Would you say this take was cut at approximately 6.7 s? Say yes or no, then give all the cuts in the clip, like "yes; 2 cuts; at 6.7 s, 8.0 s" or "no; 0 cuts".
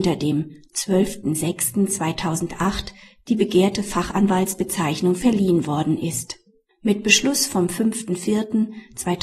yes; 1 cut; at 6.7 s